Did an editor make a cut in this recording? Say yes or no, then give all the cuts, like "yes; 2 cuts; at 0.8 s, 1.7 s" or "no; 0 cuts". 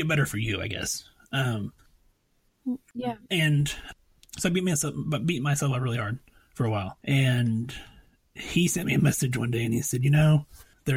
yes; 1 cut; at 7.0 s